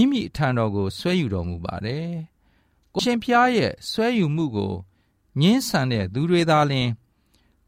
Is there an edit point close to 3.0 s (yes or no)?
yes